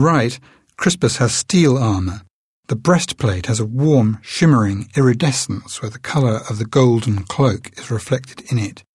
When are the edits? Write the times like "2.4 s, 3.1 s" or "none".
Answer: none